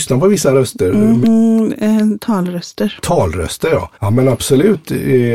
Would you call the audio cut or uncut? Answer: cut